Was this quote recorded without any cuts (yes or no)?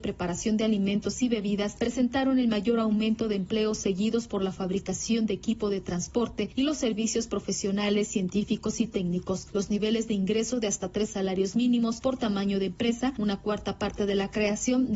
yes